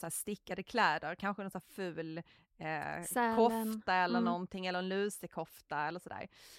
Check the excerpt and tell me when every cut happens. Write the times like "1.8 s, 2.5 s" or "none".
none